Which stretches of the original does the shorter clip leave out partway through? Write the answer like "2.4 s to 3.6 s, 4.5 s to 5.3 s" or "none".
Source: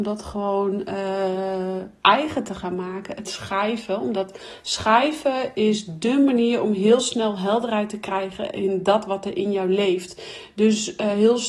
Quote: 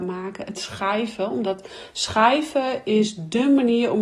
none

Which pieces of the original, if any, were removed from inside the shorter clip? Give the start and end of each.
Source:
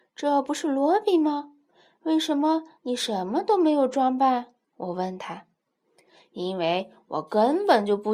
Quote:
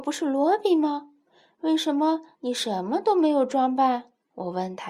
none

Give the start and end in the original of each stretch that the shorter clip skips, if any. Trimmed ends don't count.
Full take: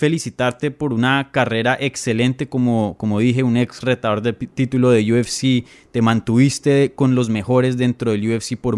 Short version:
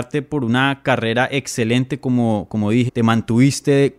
3.4 s to 5.9 s

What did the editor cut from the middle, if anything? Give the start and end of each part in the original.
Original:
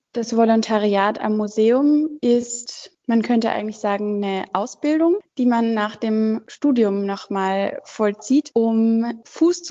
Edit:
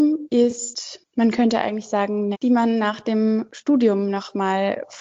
4.2 s to 5.3 s

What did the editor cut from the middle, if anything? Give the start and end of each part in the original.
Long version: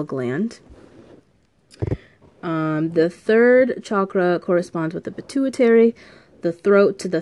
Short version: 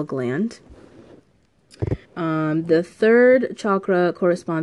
2.0 s to 2.3 s

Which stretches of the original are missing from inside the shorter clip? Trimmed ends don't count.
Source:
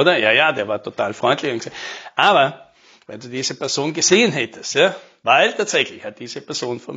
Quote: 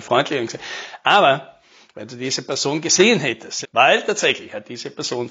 4.7 s to 5.1 s

